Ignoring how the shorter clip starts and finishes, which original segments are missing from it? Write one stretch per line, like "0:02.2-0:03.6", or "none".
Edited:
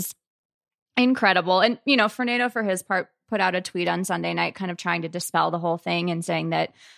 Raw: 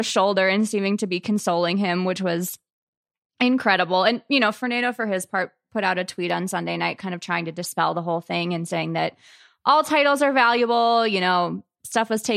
none